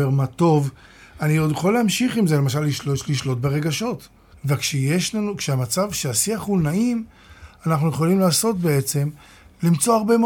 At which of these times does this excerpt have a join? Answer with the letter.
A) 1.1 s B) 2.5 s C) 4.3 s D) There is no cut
C